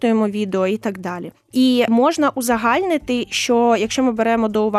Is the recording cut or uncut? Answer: uncut